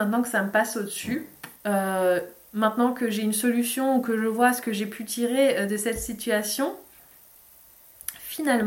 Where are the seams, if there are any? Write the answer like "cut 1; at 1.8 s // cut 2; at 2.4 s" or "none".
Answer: cut 1; at 1.6 s